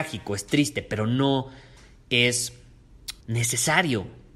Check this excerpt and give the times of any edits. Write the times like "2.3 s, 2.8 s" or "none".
3.2 s